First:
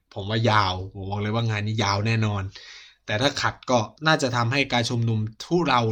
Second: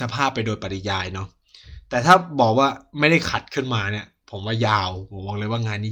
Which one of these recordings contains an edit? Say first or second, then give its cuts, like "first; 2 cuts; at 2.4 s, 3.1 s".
first; 1 cut; at 4.0 s